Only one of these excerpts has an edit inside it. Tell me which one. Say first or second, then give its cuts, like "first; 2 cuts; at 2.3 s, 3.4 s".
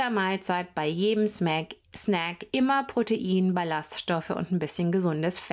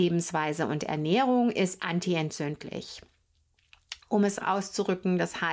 second; 1 cut; at 4.4 s